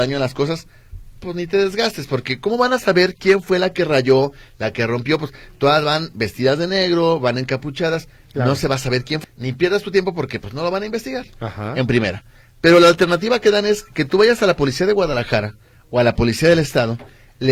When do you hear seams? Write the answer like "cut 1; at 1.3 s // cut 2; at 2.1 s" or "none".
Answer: cut 1; at 9.2 s